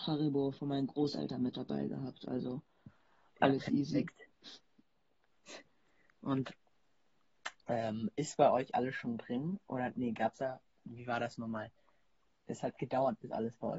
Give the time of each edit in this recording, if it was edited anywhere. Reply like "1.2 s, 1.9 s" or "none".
4.3 s

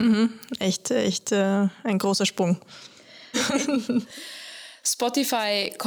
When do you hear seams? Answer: 3.3 s

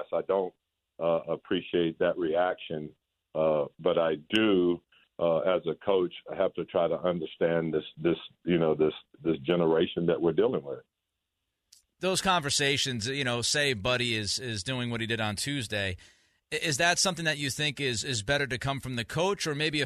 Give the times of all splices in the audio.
none

